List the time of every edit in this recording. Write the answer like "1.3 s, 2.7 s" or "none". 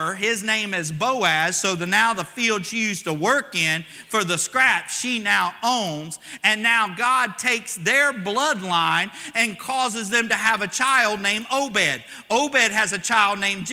none